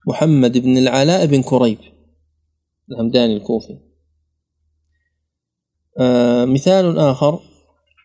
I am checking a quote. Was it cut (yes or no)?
no